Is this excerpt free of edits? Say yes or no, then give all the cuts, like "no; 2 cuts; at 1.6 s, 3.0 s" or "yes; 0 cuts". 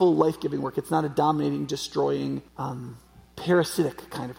no; 1 cut; at 2.5 s